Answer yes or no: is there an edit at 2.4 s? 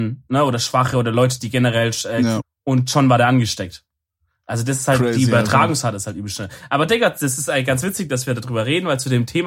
yes